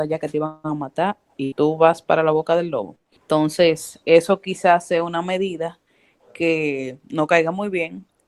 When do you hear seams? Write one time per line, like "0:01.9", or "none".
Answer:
none